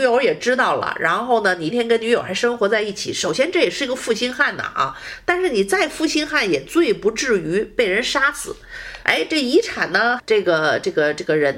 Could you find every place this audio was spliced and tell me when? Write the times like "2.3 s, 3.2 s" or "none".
1.7 s, 9.0 s, 10.2 s